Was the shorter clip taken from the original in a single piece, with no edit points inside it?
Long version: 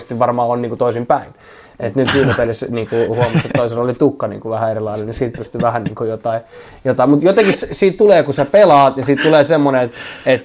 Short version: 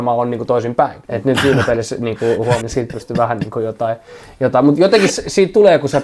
no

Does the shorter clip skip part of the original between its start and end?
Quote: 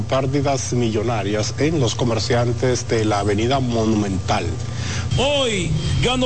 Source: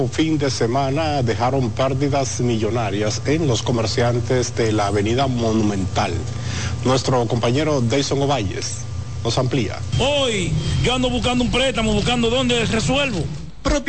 yes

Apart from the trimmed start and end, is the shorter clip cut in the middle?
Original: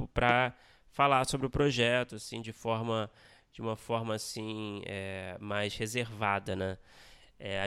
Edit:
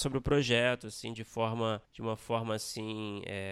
yes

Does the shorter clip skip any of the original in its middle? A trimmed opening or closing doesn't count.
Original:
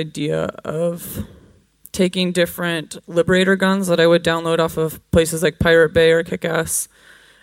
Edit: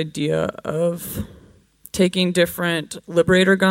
no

